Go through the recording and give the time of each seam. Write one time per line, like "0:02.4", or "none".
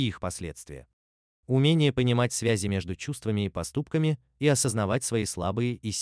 none